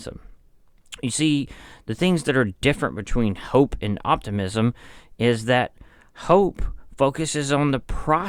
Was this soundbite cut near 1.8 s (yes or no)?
yes